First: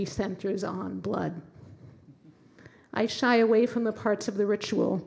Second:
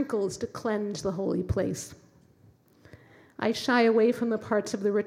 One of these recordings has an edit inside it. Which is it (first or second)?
first